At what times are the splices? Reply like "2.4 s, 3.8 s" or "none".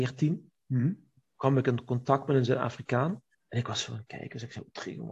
3.3 s